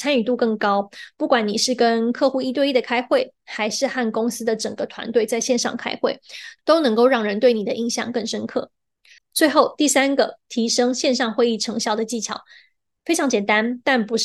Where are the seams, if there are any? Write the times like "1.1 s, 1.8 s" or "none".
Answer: 9.2 s